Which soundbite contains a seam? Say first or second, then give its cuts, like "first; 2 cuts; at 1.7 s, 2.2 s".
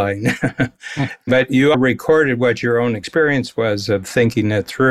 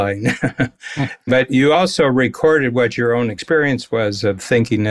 first; 1 cut; at 1.7 s